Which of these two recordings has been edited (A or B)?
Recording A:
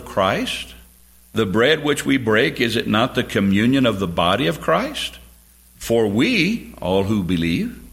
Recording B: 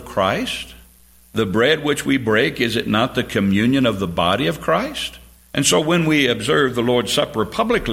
B